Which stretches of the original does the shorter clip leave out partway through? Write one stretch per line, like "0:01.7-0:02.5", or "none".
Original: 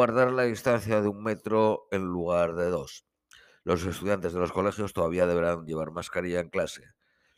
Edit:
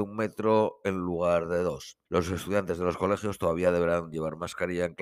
0:03.1-0:03.6